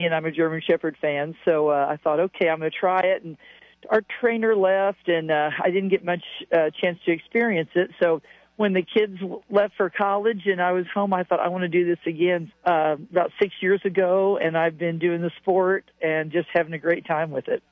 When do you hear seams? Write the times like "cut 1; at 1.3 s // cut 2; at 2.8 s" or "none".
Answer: cut 1; at 12.5 s

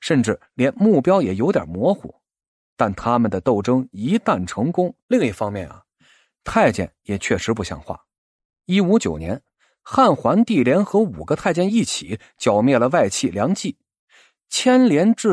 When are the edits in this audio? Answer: cut 1; at 5.0 s

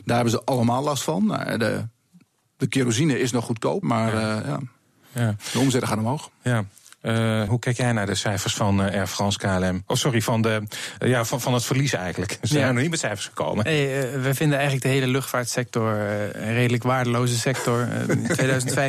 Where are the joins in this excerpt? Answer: cut 1; at 3.8 s // cut 2; at 7.5 s

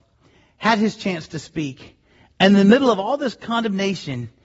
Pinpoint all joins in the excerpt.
none

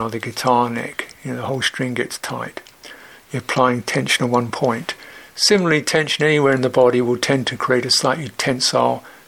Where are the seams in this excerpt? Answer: none

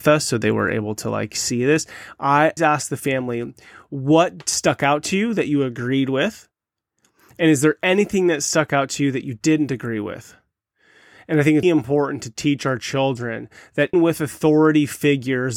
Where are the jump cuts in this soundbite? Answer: cut 1; at 2.6 s // cut 2; at 11.6 s // cut 3; at 13.9 s

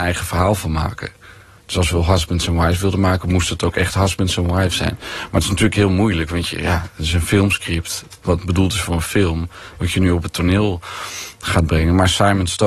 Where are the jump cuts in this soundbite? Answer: none

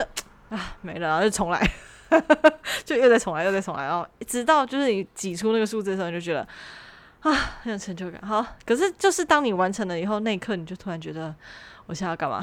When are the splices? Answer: none

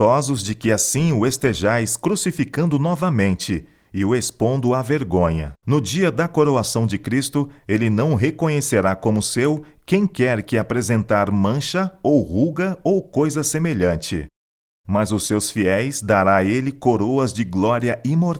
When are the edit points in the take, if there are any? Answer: cut 1; at 5.6 s

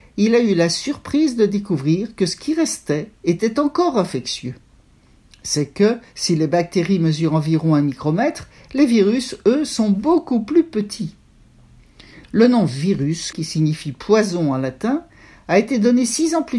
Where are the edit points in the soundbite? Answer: cut 1; at 13.3 s

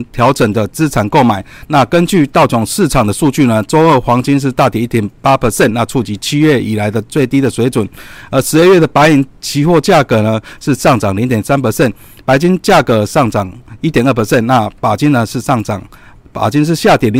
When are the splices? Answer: cut 1; at 1.6 s

